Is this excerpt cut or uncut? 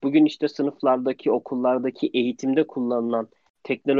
uncut